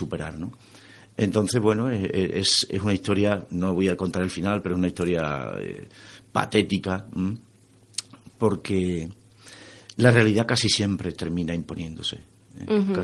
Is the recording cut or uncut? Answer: uncut